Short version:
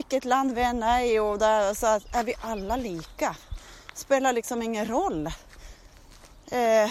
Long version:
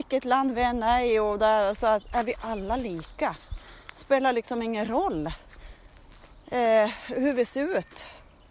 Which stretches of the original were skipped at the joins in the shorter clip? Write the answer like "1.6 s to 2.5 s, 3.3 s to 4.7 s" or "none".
none